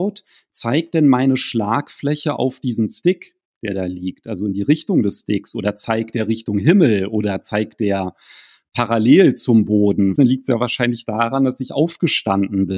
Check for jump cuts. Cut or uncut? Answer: cut